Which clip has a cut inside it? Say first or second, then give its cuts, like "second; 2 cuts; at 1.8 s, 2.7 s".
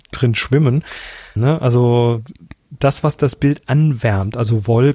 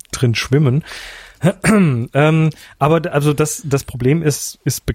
first; 1 cut; at 1.4 s